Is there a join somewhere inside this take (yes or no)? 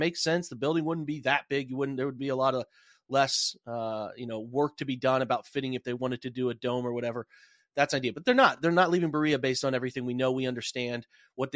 no